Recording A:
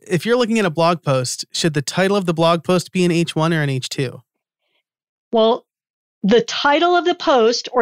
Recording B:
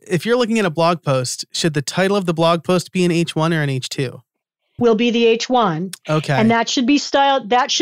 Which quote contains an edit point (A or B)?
B